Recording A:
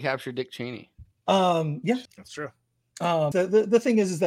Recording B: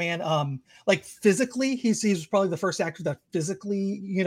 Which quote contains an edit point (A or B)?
A